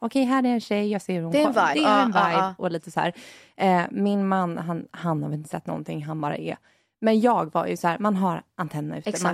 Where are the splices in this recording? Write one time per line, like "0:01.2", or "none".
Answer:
0:01.7